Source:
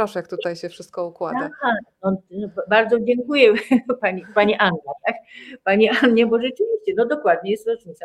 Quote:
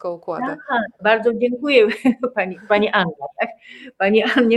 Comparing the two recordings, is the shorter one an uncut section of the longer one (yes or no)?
no